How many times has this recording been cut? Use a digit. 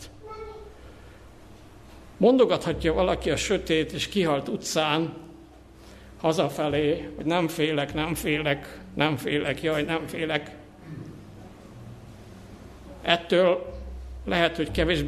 0